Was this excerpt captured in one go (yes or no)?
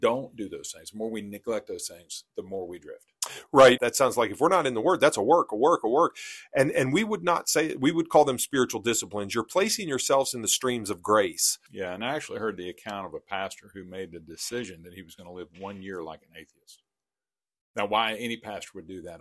no